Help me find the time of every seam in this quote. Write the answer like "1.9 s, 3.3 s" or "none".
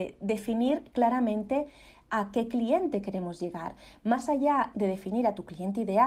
4.7 s